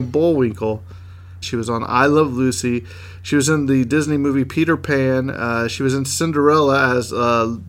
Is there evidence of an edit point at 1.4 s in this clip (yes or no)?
yes